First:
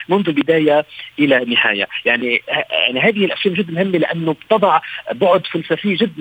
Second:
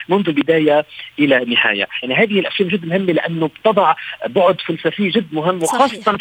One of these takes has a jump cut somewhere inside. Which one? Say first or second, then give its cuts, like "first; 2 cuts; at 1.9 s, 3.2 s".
second; 1 cut; at 2.0 s